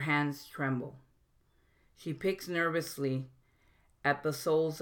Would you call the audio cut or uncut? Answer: uncut